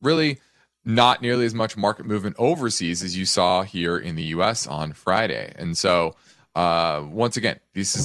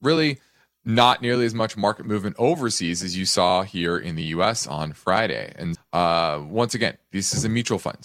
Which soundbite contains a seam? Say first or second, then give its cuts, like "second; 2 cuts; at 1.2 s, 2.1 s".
second; 1 cut; at 5.7 s